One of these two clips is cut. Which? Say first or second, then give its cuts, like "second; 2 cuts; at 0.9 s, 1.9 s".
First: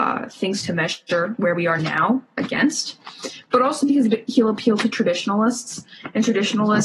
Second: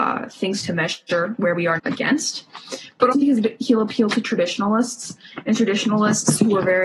second; 2 cuts; at 1.8 s, 3.1 s